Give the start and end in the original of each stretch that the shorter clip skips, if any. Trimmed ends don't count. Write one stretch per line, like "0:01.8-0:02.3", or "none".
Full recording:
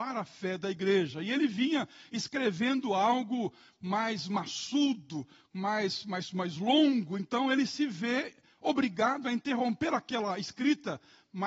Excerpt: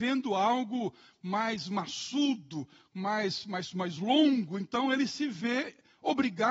none